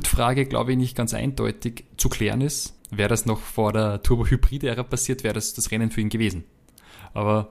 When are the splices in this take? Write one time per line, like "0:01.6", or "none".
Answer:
0:02.8